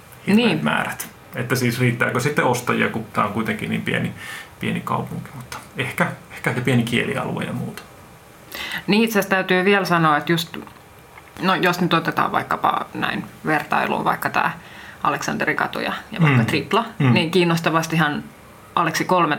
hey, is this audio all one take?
yes; 0 cuts

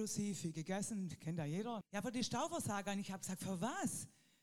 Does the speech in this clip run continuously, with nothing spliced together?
no; 1 cut; at 1.8 s

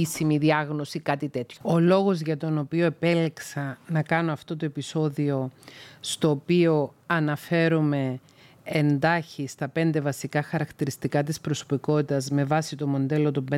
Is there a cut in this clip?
yes; 1 cut; at 1.6 s

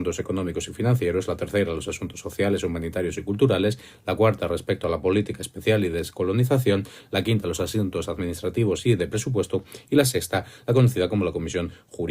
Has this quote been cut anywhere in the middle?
no; 0 cuts

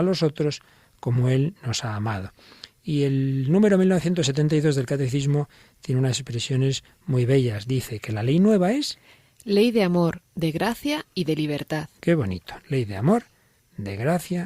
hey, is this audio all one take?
yes; 0 cuts

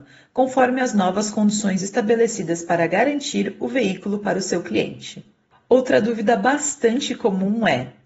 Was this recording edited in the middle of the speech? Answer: no; 0 cuts

